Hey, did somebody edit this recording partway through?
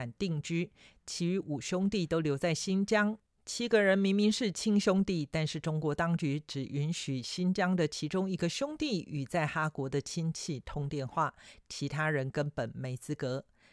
no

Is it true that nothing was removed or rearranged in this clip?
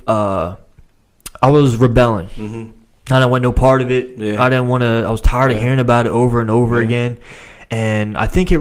yes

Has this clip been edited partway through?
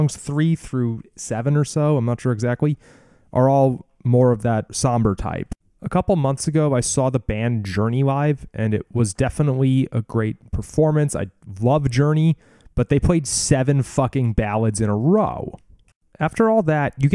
yes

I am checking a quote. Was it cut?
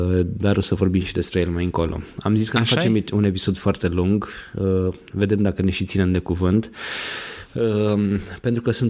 no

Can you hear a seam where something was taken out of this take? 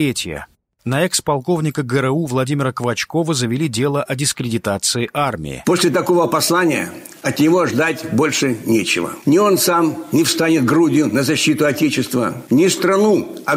yes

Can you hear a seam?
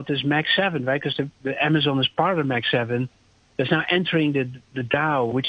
no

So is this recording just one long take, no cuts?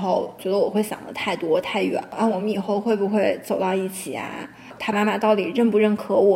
no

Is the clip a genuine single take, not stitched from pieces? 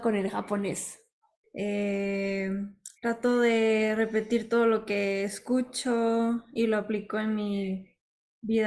no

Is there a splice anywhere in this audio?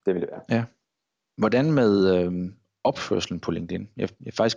no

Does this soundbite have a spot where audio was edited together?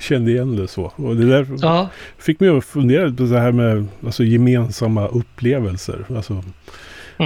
no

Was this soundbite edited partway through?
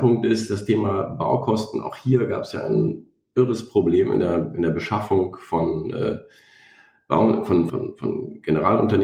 yes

